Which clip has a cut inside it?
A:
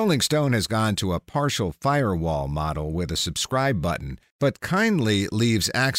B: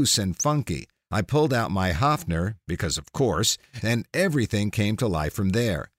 B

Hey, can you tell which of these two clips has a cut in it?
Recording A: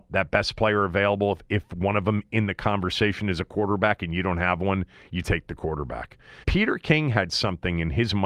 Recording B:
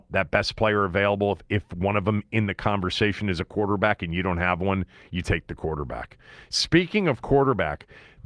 A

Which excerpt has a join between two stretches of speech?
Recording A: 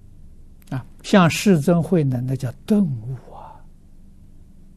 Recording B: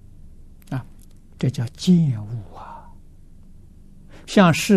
A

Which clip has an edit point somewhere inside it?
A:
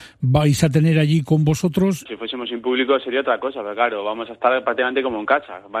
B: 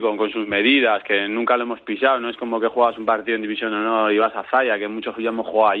A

